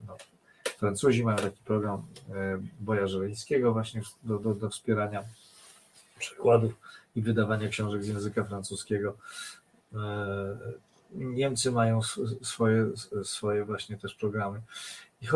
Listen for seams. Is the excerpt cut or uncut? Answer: uncut